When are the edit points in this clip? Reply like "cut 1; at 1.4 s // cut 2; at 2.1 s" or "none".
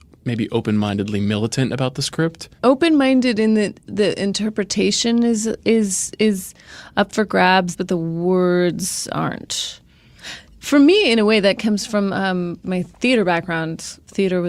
cut 1; at 7.7 s